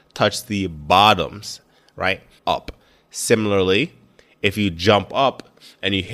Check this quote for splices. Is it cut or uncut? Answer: cut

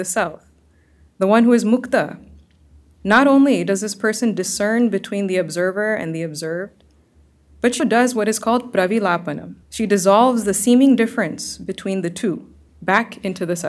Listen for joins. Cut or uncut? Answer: cut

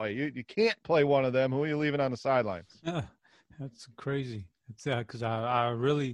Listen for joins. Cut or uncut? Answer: uncut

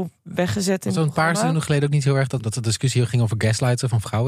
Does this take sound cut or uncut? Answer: cut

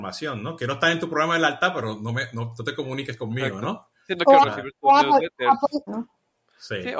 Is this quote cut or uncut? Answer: cut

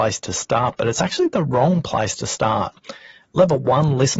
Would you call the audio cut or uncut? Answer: uncut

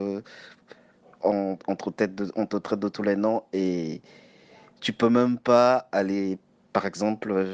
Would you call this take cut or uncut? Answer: uncut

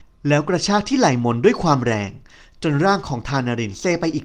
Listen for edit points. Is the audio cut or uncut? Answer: uncut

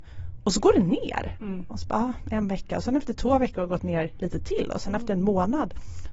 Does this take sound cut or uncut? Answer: uncut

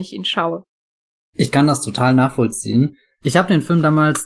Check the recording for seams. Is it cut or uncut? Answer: uncut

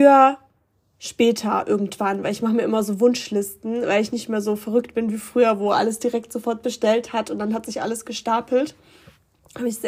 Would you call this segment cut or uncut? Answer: uncut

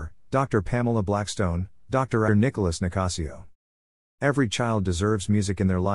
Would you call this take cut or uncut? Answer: cut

